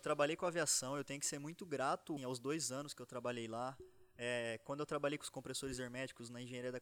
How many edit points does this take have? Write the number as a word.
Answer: one